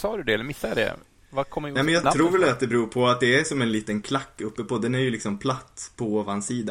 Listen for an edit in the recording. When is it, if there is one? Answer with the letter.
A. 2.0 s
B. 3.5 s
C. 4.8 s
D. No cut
A